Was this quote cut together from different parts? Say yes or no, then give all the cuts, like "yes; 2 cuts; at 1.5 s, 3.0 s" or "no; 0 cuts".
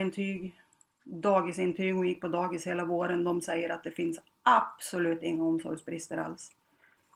no; 0 cuts